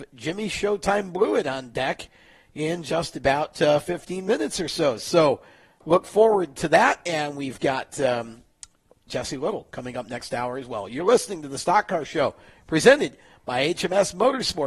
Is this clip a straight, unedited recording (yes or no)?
yes